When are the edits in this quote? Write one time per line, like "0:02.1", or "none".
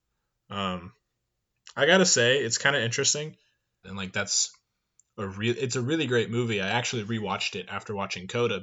0:03.8